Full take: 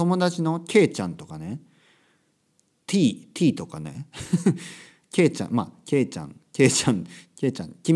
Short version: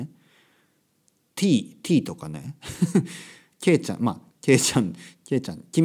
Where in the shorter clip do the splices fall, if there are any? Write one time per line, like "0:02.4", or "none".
0:04.3